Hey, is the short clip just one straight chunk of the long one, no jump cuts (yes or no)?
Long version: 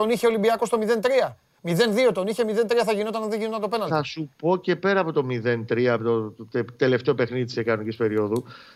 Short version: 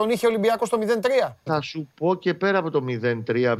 no